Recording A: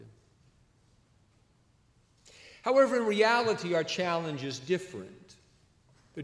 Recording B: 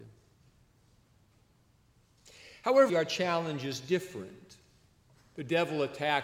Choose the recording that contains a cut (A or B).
B